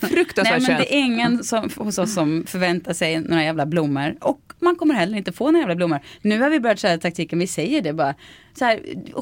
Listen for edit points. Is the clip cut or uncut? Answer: uncut